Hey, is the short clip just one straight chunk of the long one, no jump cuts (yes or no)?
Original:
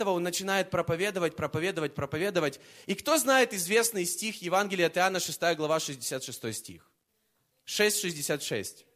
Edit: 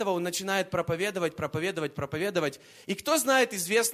yes